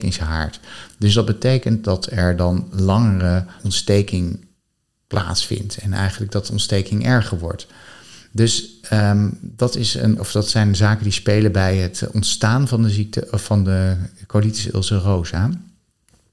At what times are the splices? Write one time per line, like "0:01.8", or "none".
0:03.6
0:10.2

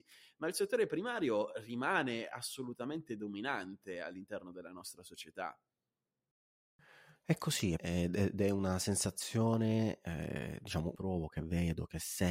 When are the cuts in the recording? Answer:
0:07.8
0:10.9

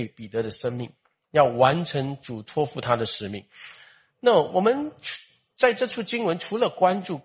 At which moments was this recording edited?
none

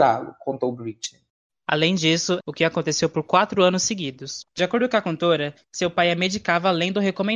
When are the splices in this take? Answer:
0:02.4
0:04.5

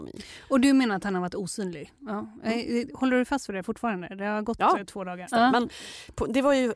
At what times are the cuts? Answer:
0:01.9
0:05.3

